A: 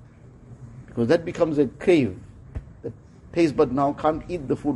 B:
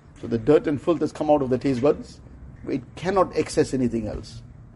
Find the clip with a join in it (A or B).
B